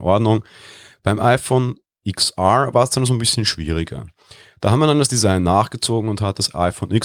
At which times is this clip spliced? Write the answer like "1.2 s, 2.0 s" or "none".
none

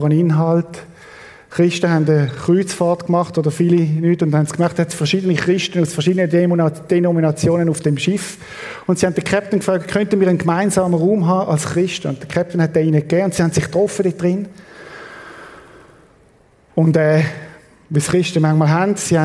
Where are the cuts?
none

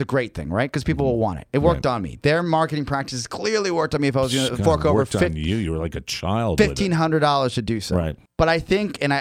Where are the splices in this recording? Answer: none

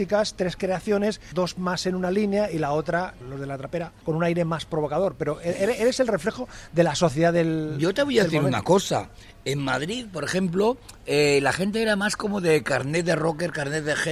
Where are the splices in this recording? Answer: none

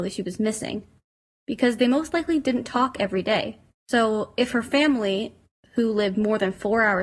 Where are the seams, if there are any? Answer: 3.7 s

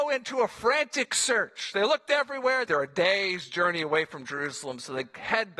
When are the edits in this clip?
2.7 s

